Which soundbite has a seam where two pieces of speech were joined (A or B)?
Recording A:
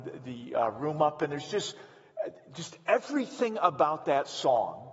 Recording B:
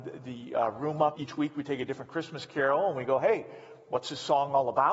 B